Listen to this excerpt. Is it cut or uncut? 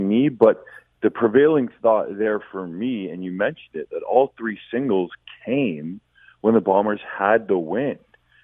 uncut